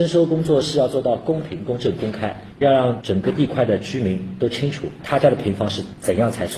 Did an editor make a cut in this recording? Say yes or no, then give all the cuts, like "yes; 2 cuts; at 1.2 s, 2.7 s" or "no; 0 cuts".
no; 0 cuts